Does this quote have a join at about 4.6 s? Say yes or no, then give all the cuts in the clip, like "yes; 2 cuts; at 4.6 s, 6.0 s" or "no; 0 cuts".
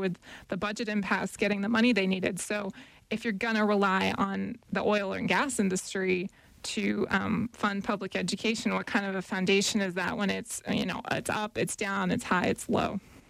yes; 1 cut; at 4.6 s